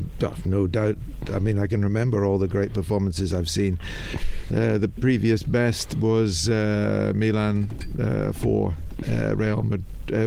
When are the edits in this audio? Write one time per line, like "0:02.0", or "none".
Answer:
none